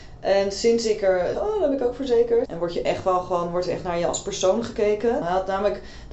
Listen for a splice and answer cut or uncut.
cut